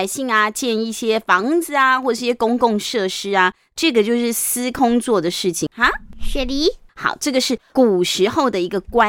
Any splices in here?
yes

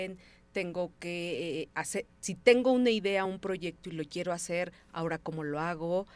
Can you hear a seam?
no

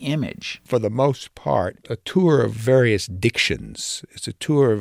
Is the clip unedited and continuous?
no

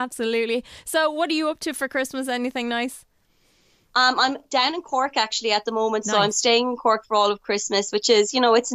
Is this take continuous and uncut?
yes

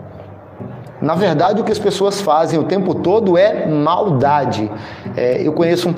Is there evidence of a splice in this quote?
no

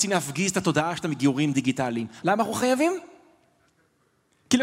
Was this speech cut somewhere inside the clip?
yes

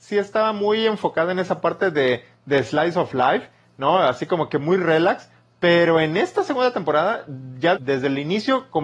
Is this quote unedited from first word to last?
no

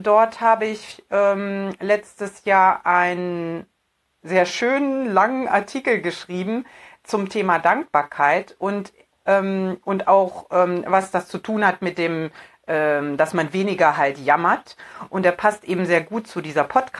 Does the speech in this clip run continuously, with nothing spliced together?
yes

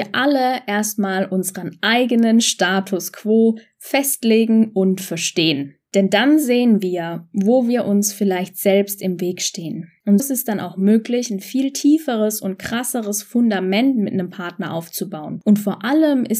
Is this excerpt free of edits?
no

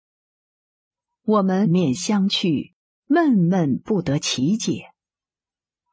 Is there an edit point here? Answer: yes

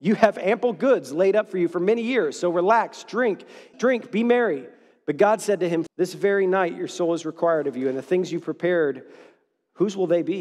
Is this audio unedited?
no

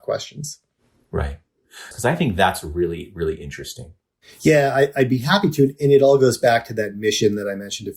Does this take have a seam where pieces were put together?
yes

